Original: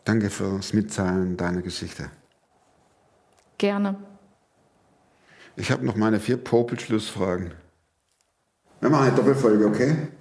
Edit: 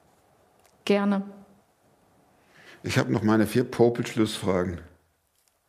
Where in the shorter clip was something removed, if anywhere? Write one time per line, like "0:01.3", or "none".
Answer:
none